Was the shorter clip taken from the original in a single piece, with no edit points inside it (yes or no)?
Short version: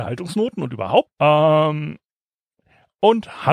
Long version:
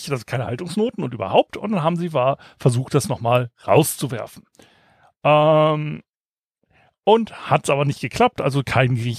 no